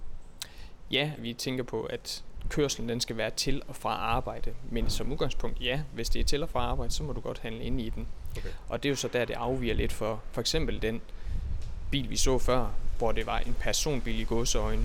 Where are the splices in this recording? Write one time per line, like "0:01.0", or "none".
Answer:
0:01.2